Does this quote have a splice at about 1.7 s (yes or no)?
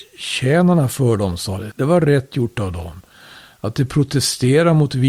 yes